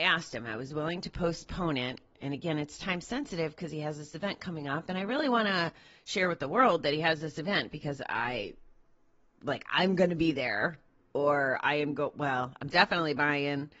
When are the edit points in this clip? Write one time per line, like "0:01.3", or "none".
none